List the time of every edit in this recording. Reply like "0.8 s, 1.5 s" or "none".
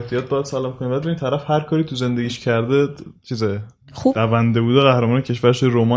4.1 s